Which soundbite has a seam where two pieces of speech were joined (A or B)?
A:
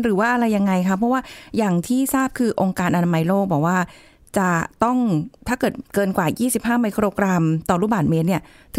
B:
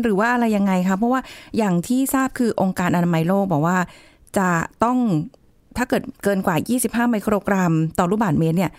A